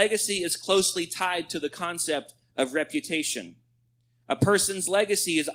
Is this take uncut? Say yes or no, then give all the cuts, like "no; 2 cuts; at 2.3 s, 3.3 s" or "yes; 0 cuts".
yes; 0 cuts